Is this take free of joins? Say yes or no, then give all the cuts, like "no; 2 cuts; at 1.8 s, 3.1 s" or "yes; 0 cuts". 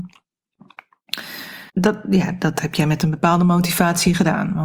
no; 1 cut; at 1.7 s